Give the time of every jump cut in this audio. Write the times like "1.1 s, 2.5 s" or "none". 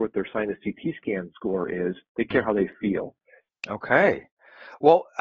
3.5 s

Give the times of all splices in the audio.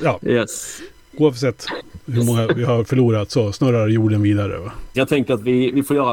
4.9 s

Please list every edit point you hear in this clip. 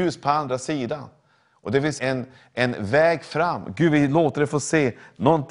2.0 s

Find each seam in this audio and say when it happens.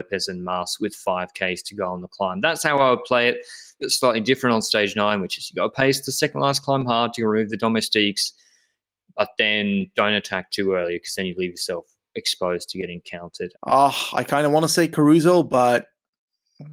3.8 s, 13.5 s

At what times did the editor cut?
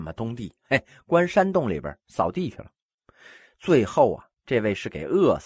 none

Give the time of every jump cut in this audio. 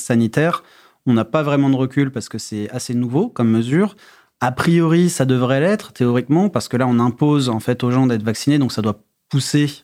none

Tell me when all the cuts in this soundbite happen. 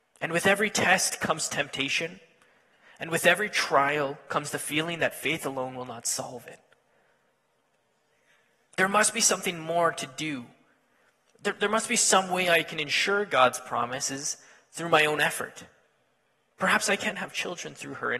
16.5 s

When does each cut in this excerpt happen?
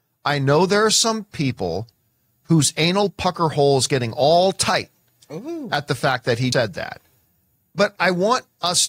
6.5 s, 8.0 s

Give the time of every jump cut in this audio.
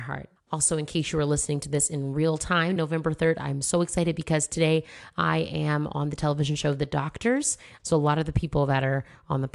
2.8 s, 7.8 s

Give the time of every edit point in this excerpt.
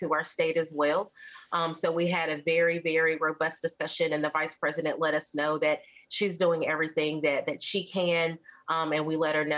none

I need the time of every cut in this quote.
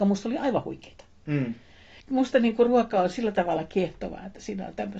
2.0 s

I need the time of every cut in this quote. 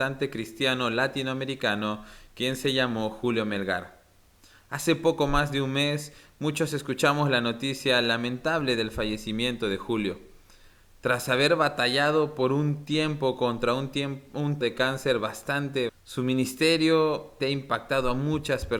14.6 s, 15.9 s, 17.4 s

